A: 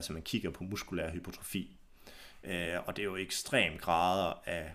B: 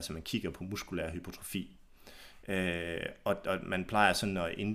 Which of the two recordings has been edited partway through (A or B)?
B